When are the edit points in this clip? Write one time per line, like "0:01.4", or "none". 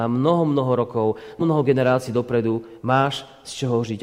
0:01.4